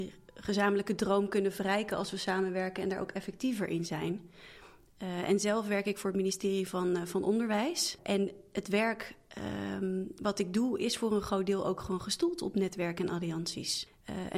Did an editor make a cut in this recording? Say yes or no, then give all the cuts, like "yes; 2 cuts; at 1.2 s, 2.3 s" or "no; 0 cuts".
no; 0 cuts